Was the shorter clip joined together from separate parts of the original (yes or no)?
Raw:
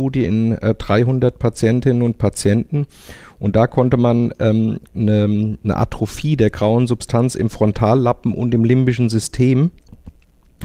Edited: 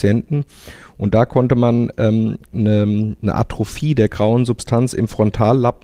no